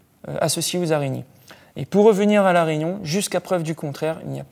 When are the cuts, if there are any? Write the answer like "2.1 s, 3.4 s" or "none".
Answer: none